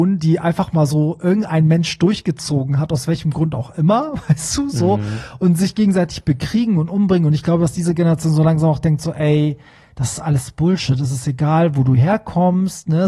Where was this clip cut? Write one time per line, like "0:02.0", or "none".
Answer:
none